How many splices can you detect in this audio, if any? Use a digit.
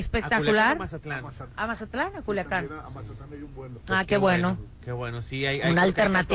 1